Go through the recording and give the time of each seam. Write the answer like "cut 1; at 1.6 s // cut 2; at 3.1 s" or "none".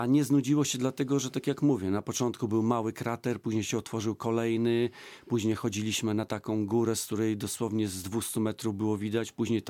none

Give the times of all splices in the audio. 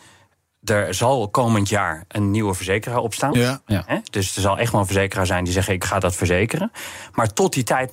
cut 1; at 3.3 s

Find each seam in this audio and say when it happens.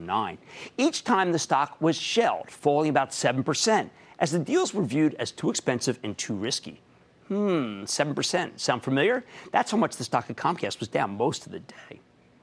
none

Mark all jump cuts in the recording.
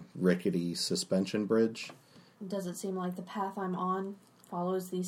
cut 1; at 2.4 s

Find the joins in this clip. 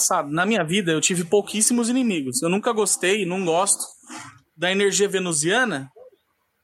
cut 1; at 4.5 s

